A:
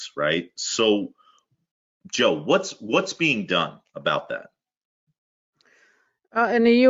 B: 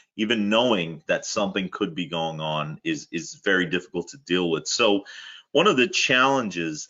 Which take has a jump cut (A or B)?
B